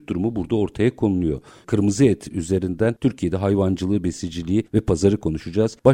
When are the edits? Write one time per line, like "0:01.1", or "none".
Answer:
0:01.6